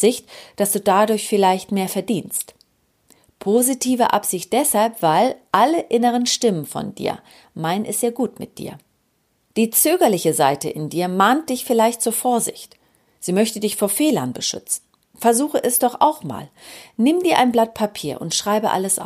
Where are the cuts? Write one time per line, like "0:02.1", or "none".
0:15.0